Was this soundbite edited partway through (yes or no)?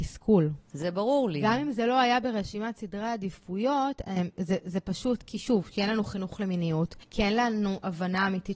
no